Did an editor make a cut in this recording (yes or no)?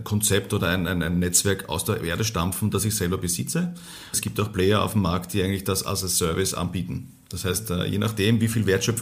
yes